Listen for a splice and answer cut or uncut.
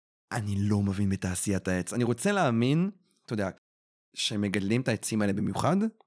uncut